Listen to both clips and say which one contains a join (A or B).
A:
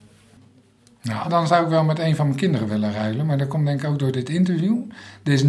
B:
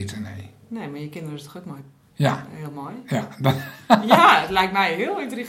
A